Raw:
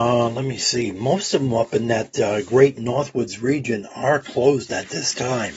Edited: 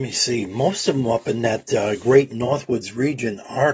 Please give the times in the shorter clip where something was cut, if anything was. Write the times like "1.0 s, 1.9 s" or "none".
none